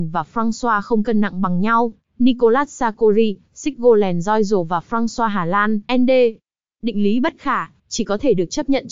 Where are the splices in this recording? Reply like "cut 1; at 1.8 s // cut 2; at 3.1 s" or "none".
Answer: cut 1; at 5.9 s // cut 2; at 7.8 s